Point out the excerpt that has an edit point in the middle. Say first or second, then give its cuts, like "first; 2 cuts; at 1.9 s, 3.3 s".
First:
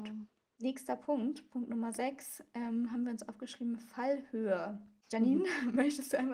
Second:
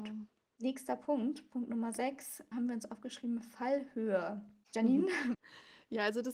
second; 2 cuts; at 2.5 s, 5.3 s